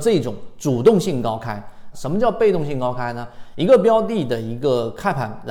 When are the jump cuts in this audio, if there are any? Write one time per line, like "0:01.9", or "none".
0:01.9